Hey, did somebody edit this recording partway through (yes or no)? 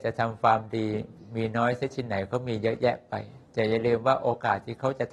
yes